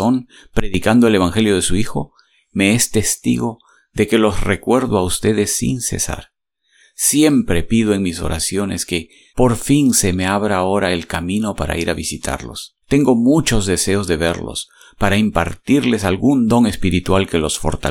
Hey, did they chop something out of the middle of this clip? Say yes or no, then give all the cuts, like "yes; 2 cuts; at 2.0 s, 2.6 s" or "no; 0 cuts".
yes; 2 cuts; at 9.3 s, 12.8 s